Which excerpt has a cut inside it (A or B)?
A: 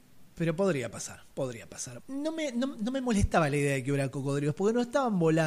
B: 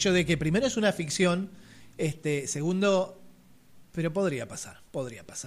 A